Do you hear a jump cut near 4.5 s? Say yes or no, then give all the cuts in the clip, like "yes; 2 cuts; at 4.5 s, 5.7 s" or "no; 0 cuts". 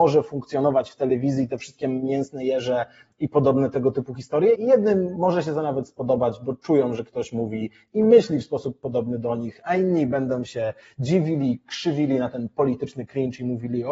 yes; 1 cut; at 4.5 s